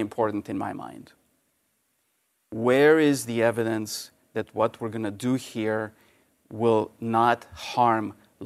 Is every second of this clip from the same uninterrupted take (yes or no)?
yes